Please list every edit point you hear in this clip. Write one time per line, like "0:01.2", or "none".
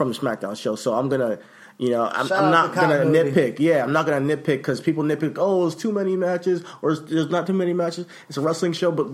none